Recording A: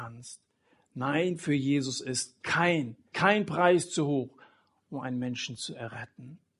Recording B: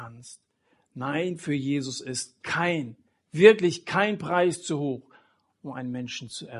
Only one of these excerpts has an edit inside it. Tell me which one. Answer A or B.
A